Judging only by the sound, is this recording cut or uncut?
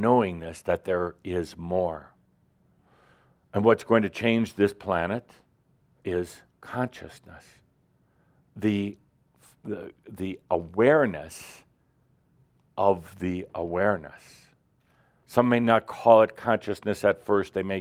uncut